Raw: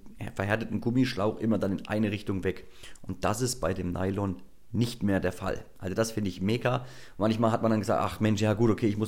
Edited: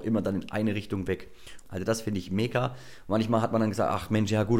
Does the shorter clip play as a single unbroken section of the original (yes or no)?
no